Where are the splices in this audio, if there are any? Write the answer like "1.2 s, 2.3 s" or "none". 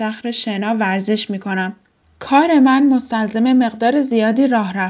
2.0 s